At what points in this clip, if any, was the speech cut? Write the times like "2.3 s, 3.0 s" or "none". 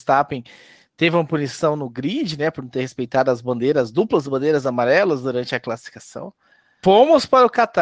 6.8 s